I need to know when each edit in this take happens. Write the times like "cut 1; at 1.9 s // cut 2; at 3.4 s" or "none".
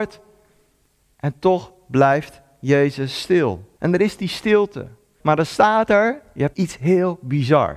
cut 1; at 3.8 s // cut 2; at 5.2 s // cut 3; at 6.5 s